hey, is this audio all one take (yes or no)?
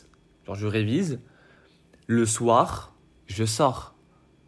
yes